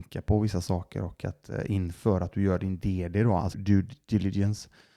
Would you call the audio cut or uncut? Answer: cut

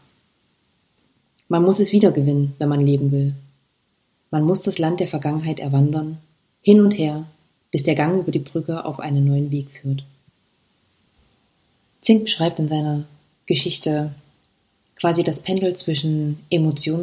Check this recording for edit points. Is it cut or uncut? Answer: uncut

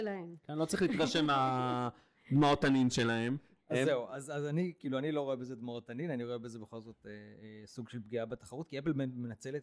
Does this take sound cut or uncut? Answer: uncut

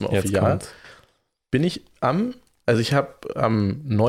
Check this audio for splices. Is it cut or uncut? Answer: uncut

